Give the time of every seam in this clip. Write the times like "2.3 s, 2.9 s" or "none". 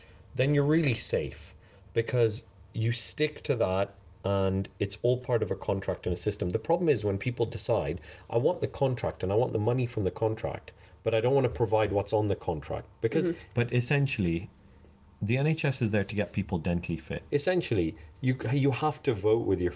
13.5 s, 17.3 s

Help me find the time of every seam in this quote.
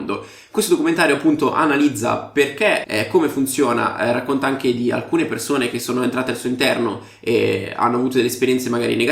2.8 s

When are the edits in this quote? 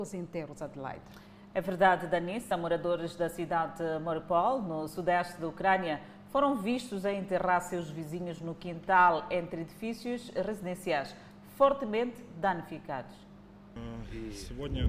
none

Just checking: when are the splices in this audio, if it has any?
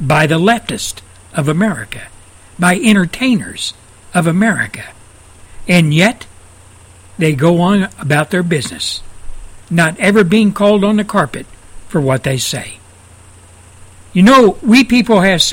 none

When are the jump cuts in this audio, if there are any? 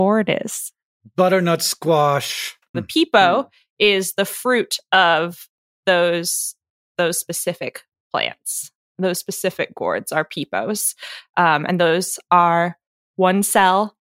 2.7 s

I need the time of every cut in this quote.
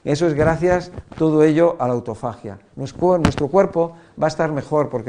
2.7 s

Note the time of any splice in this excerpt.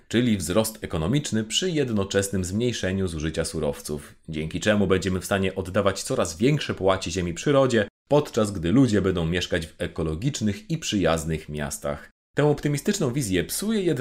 12.2 s

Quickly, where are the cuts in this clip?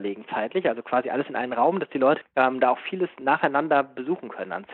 2.2 s

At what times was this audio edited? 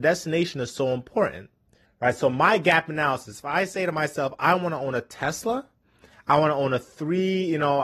1.8 s

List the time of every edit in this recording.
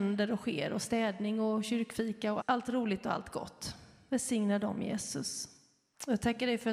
2.4 s

